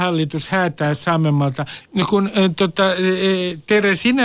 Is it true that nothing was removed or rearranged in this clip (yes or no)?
no